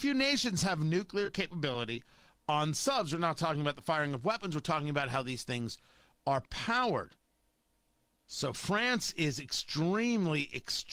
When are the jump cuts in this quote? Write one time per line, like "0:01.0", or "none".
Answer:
0:08.1